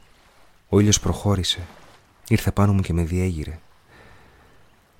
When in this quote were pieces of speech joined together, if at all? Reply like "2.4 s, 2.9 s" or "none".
none